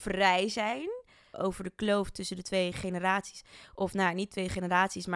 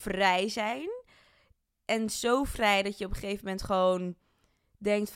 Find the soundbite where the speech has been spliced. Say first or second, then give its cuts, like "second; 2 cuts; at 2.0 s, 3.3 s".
first; 1 cut; at 1.3 s